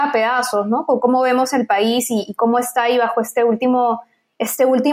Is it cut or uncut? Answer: uncut